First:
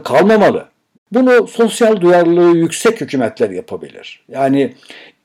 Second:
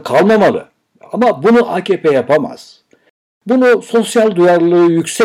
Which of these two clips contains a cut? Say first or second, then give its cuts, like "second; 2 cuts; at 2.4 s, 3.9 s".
first; 1 cut; at 1.0 s